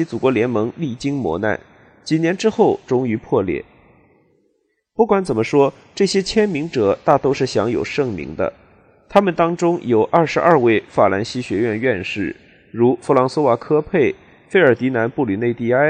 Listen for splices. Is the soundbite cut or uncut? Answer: uncut